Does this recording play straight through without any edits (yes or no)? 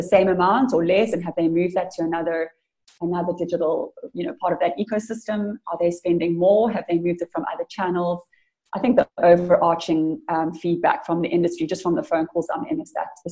yes